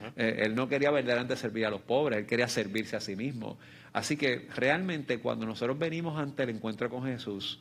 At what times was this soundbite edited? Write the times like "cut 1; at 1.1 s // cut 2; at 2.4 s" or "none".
none